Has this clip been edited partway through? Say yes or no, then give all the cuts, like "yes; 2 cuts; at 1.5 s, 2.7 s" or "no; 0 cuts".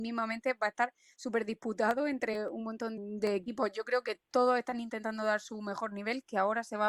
yes; 1 cut; at 3.0 s